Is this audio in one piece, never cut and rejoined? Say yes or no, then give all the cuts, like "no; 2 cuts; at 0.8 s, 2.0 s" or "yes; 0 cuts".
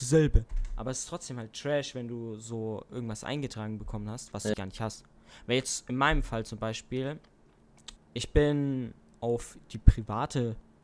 no; 2 cuts; at 4.5 s, 8.0 s